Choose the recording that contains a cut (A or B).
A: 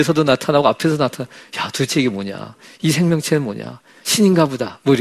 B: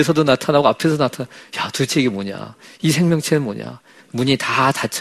B